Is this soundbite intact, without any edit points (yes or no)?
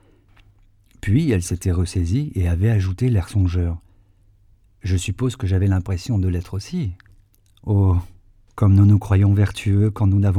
yes